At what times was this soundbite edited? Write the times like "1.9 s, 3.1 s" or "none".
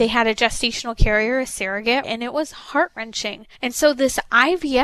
2.0 s, 3.5 s